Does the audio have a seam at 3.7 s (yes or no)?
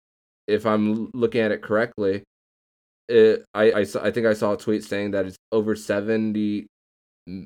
yes